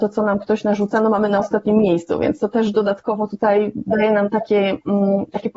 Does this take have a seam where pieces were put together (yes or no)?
no